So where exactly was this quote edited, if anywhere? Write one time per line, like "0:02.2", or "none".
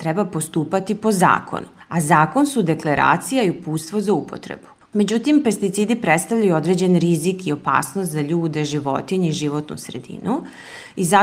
0:04.9